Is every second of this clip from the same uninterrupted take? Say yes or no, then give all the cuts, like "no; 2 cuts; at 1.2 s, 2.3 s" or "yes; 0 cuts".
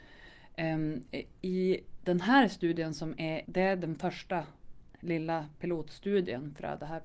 no; 1 cut; at 3.4 s